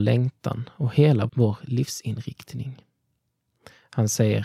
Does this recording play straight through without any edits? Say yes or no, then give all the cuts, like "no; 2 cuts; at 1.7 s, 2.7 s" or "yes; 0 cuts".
no; 1 cut; at 1.3 s